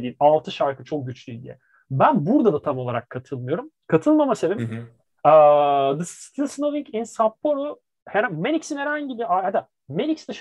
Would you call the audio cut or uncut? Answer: uncut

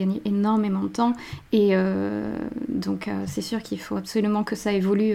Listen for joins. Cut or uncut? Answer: uncut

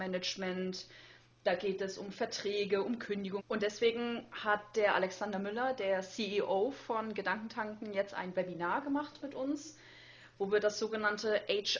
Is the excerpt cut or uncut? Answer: cut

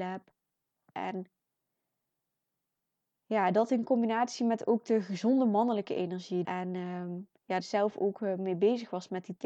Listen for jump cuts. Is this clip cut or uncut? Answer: cut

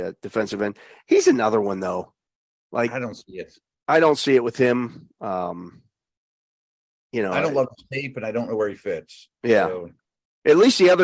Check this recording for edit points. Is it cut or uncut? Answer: uncut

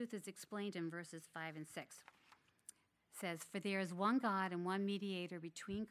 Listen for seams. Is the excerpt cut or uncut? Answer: uncut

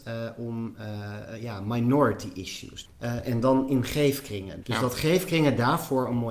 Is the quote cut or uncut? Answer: cut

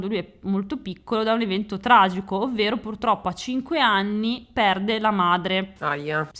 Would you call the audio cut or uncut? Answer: uncut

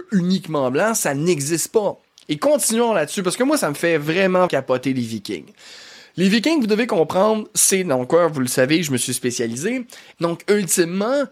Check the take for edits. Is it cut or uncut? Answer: cut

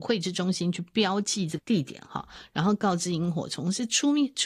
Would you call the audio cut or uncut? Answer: cut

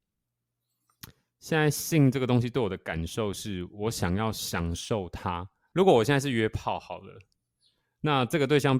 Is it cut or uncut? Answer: cut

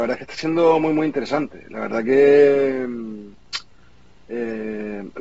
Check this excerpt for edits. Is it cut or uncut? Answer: uncut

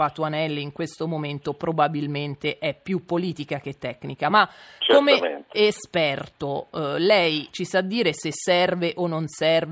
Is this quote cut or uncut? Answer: uncut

